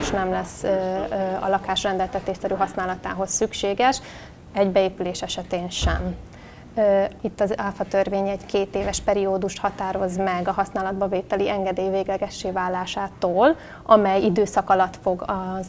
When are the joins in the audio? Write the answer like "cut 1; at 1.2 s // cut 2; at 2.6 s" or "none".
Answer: cut 1; at 7.2 s